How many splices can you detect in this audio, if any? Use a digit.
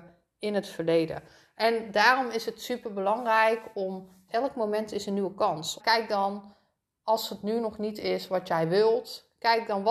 2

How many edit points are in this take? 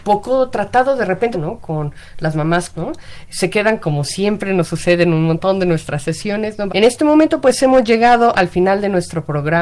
3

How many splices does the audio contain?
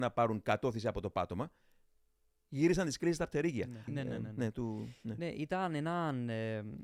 1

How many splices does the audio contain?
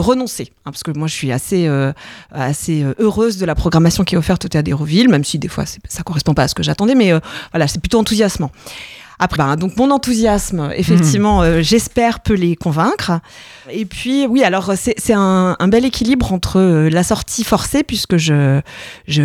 1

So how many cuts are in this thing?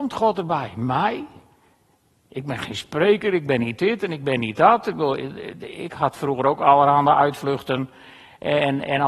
0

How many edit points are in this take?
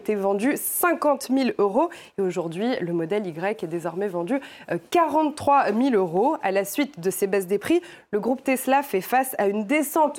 0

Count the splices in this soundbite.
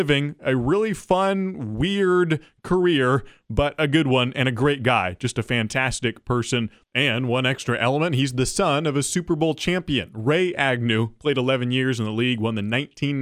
0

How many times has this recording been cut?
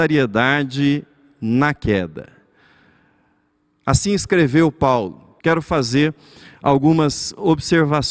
1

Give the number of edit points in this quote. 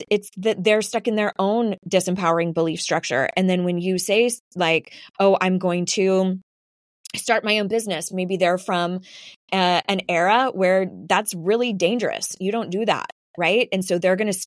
0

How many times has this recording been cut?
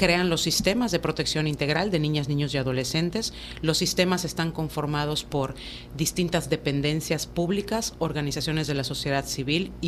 0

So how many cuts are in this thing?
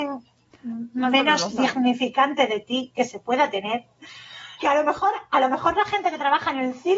1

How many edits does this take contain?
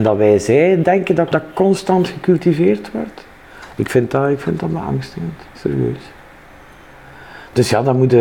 2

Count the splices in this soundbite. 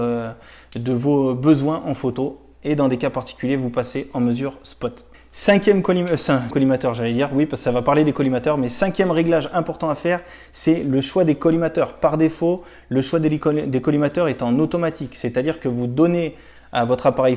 1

